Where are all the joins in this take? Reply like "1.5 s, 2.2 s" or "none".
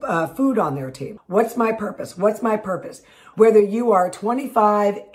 1.2 s, 3.3 s